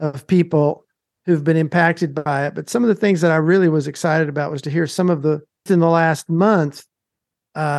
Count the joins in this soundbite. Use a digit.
1